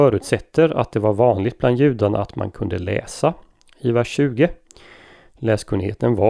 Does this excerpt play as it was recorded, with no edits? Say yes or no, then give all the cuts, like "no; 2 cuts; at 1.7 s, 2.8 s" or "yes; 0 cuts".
yes; 0 cuts